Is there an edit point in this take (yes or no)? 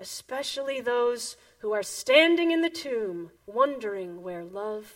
yes